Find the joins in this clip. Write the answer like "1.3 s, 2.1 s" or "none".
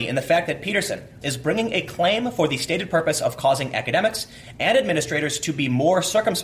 1.2 s